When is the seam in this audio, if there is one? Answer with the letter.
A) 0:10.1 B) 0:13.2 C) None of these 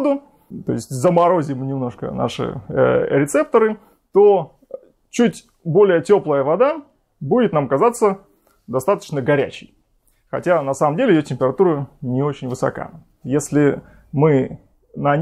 B